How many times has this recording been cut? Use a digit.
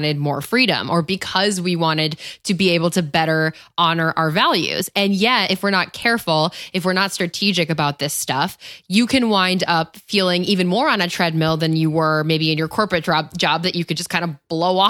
0